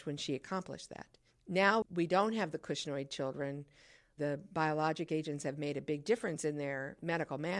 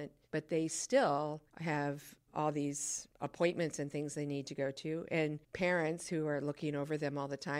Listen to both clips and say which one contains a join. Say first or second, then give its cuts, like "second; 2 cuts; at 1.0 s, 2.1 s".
first; 1 cut; at 1.8 s